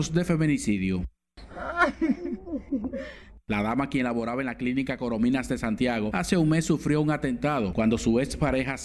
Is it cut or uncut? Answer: uncut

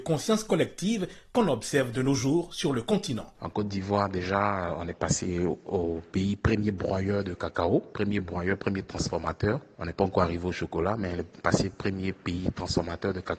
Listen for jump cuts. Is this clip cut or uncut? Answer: uncut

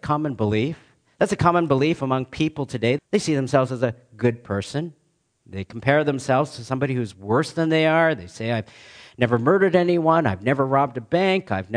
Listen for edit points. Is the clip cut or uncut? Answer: cut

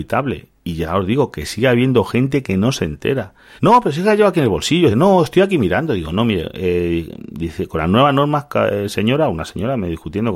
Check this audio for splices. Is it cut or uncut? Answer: cut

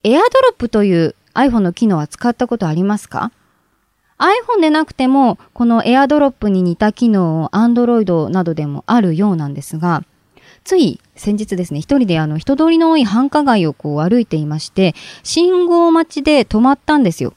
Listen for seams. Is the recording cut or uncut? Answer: uncut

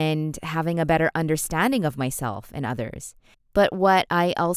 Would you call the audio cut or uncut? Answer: cut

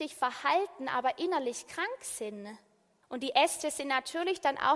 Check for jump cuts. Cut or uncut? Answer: cut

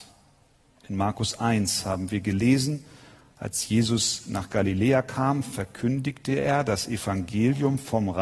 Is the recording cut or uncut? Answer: uncut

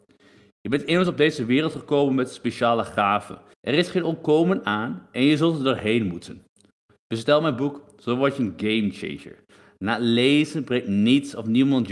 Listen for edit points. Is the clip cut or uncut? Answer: cut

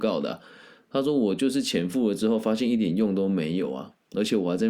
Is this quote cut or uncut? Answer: uncut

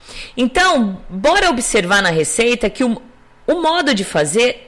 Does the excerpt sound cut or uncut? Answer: uncut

